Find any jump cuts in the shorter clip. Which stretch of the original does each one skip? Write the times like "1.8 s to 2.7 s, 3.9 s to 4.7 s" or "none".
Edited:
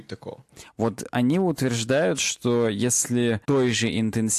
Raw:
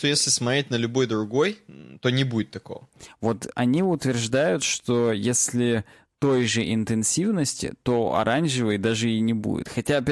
5.9 s to 6.2 s